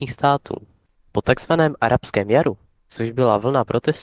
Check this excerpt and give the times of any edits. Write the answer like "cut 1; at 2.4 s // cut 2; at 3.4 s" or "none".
none